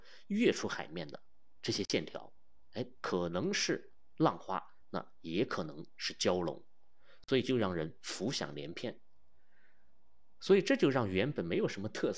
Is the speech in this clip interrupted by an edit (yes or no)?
no